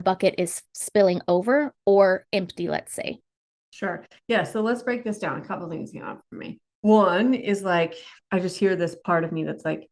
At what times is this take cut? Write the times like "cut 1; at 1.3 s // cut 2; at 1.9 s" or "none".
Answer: cut 1; at 6.7 s // cut 2; at 8.2 s